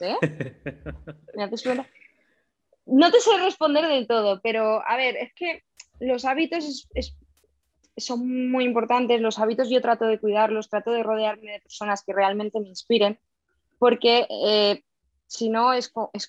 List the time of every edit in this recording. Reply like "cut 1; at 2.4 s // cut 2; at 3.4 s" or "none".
none